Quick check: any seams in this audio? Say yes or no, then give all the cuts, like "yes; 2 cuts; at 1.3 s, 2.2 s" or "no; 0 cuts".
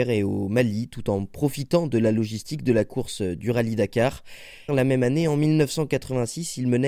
yes; 1 cut; at 4.7 s